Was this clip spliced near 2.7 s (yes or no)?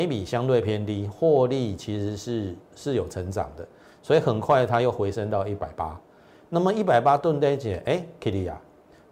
yes